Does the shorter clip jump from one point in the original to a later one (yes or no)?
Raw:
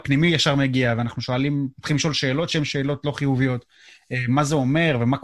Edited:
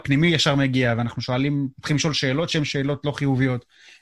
no